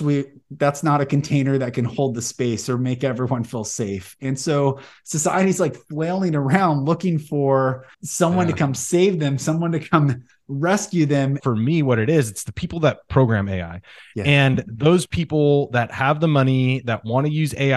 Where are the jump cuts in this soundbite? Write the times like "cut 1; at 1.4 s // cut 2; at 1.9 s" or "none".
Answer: cut 1; at 7.9 s // cut 2; at 11.4 s